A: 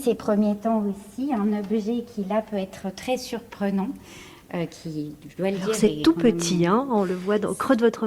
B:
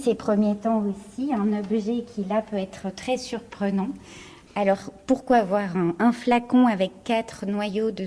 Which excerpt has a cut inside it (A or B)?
B